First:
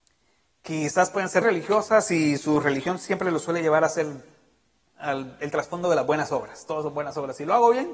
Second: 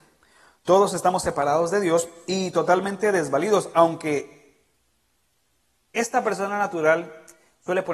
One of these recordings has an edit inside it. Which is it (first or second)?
first